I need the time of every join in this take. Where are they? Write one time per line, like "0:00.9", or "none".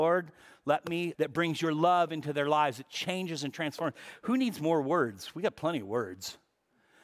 0:01.1